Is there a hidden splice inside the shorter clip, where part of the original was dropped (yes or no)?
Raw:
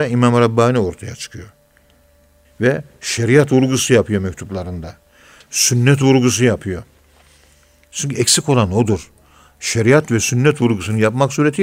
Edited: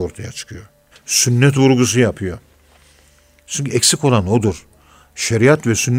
yes